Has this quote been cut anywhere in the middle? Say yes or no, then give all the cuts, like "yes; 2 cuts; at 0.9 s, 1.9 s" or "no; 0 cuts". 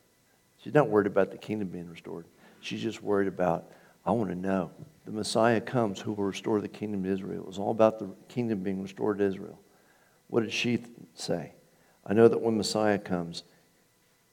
yes; 1 cut; at 5.0 s